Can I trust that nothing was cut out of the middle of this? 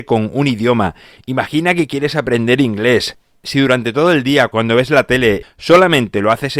no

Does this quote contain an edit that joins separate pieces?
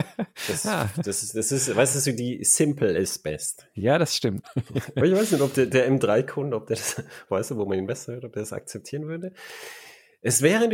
yes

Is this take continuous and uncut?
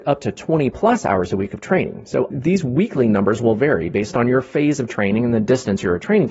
no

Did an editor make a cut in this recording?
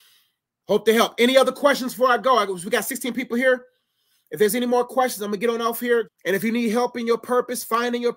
yes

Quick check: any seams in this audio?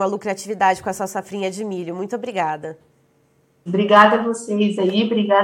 yes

